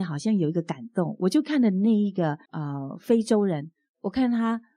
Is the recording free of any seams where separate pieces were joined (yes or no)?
no